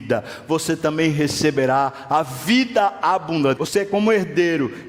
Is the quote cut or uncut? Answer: cut